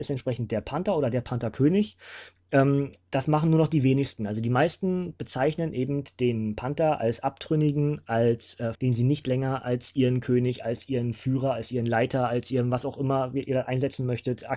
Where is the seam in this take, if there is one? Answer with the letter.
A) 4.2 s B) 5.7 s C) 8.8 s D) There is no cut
C